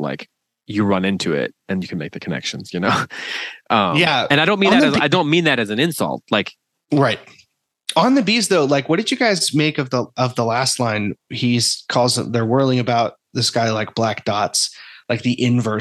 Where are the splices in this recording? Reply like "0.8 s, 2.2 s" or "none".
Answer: none